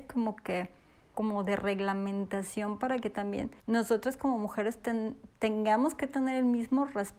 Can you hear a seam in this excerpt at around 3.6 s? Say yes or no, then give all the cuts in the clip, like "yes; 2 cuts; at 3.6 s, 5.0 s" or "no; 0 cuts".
yes; 2 cuts; at 1.1 s, 3.6 s